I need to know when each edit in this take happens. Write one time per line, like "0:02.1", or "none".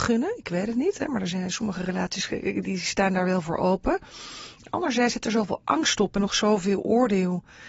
none